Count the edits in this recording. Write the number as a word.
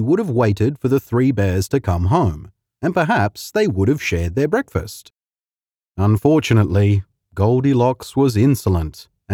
zero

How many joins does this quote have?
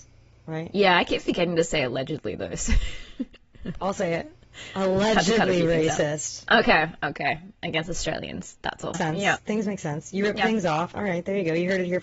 two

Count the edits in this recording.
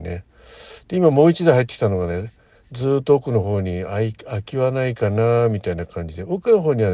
zero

